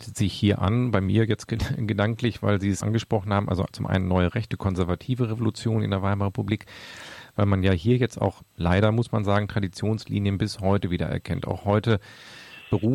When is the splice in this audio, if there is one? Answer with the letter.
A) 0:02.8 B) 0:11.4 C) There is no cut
A